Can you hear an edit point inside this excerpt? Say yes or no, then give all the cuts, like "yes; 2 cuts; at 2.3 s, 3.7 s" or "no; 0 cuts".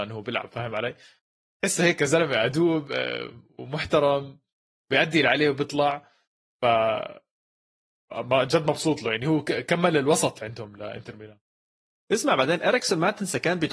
no; 0 cuts